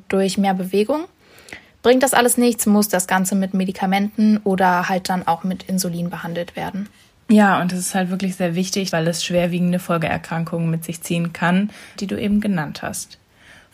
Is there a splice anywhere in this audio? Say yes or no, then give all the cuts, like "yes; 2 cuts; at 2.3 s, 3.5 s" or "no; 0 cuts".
yes; 2 cuts; at 8.9 s, 12.0 s